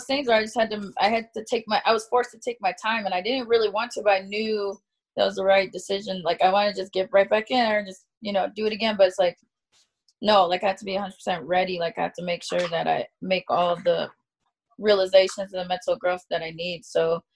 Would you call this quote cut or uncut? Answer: uncut